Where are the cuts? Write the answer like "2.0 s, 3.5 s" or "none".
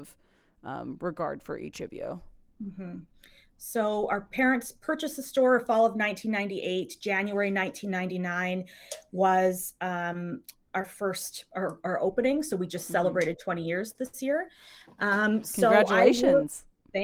none